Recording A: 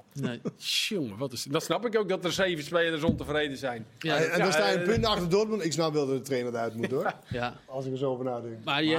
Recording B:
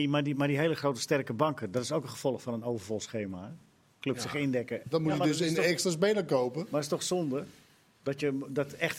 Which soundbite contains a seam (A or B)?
B